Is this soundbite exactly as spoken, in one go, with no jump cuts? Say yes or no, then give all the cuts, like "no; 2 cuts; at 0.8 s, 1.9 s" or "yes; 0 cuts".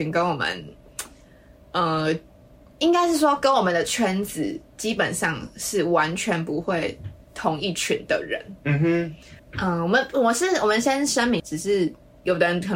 no; 2 cuts; at 9.4 s, 11.4 s